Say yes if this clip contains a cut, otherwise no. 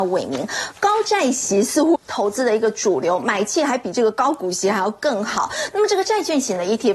yes